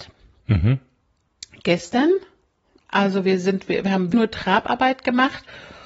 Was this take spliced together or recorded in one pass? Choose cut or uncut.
cut